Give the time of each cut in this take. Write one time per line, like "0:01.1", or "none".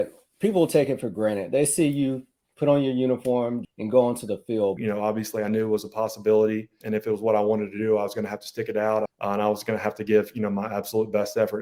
0:03.6
0:04.8
0:09.1